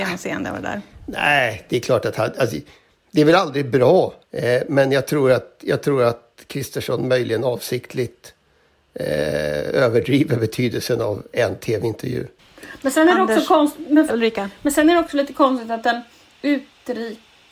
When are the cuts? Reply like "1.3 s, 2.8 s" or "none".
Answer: 4.2 s, 14.1 s

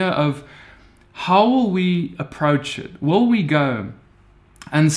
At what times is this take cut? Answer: none

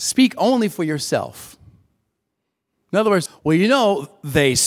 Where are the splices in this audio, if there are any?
3.3 s

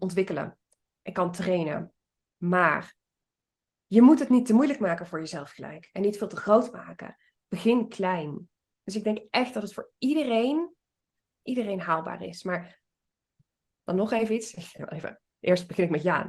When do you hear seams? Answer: 8.8 s

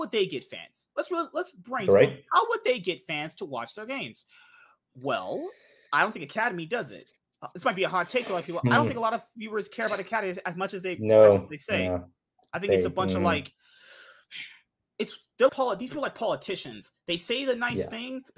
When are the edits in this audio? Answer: 15.5 s

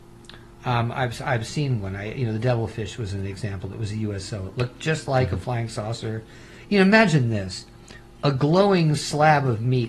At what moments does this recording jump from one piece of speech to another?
none

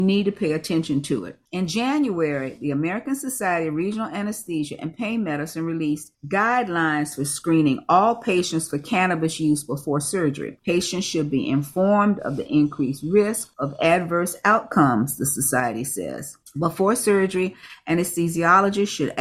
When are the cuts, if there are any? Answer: 1.5 s

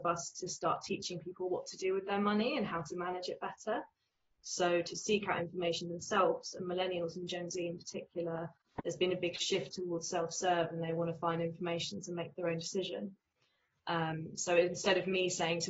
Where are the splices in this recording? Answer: 4.4 s

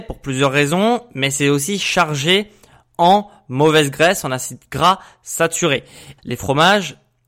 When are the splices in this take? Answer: 6.2 s

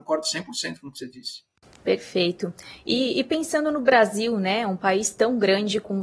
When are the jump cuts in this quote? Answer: none

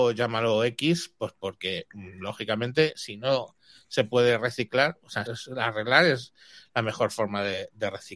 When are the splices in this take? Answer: 5.3 s

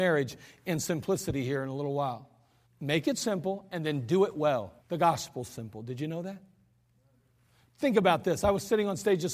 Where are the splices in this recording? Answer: 2.6 s, 4.8 s

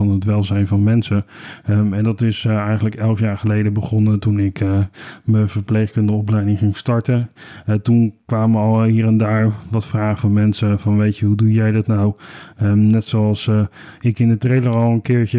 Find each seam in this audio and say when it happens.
none

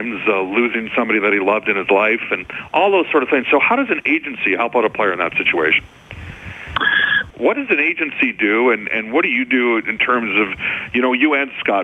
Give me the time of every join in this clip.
7.3 s

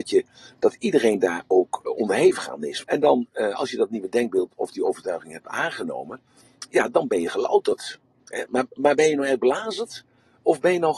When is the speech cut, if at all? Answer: 2.8 s

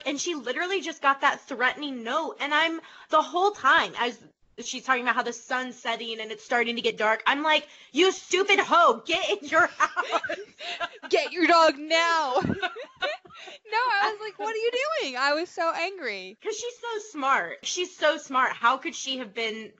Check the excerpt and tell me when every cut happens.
none

